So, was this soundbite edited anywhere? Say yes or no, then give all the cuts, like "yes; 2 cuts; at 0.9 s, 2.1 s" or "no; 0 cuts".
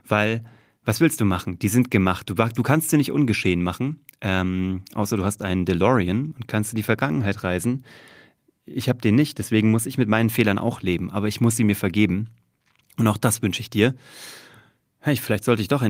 no; 0 cuts